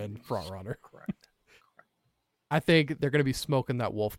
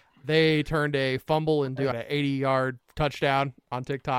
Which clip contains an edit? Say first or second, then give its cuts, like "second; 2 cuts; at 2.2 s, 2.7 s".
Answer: second; 1 cut; at 1.9 s